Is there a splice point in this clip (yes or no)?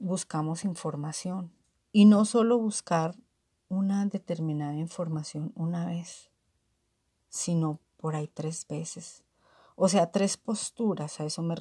yes